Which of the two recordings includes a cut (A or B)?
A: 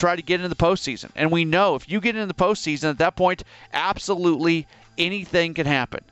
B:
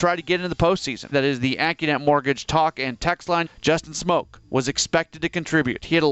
B